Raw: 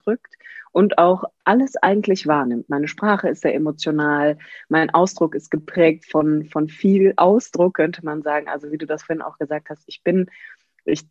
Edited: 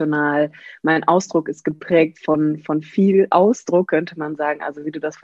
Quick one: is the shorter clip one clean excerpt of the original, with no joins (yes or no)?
yes